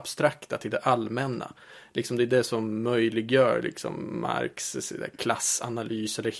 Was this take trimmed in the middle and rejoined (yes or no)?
no